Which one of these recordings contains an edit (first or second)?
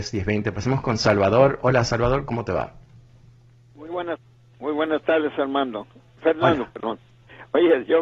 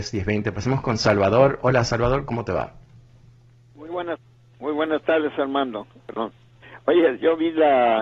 second